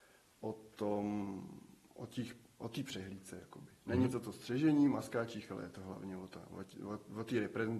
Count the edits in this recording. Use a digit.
0